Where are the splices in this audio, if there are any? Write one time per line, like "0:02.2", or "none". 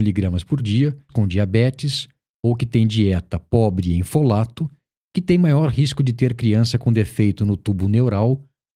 0:01.1